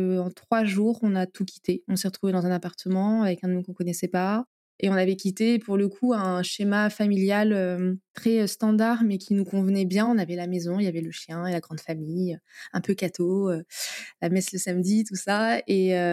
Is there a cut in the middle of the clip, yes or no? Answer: no